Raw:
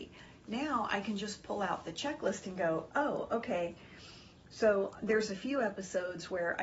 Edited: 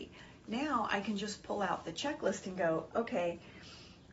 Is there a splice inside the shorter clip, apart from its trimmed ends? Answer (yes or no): yes